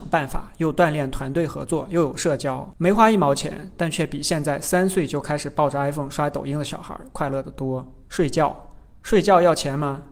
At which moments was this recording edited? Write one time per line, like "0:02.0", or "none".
none